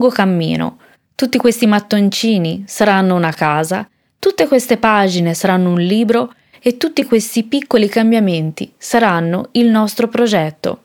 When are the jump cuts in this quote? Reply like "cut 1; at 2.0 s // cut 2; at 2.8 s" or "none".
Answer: none